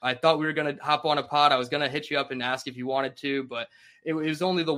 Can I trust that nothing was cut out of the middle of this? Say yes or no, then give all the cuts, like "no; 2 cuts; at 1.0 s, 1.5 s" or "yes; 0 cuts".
yes; 0 cuts